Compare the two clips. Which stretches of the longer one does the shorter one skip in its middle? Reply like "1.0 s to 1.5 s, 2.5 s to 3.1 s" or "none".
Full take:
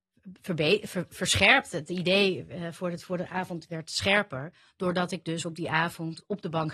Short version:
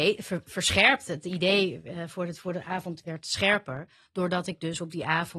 none